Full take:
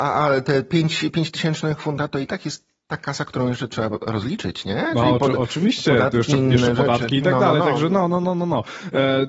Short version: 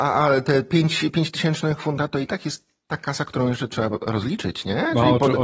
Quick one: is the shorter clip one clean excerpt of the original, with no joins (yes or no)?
yes